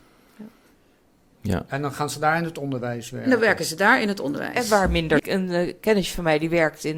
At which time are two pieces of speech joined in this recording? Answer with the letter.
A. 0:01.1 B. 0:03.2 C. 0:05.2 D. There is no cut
C